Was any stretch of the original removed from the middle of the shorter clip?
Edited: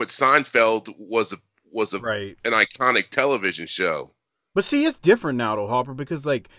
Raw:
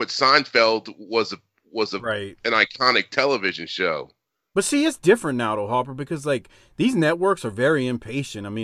no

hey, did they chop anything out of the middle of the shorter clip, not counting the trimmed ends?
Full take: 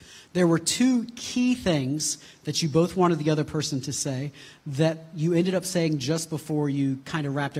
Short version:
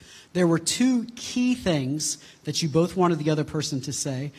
no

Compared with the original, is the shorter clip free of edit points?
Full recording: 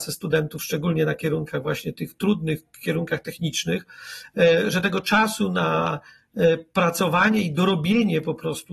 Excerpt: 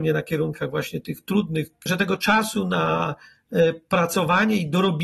no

